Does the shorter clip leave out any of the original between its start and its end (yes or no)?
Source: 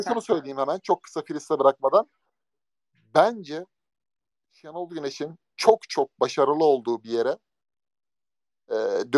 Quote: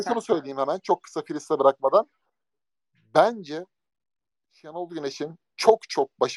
no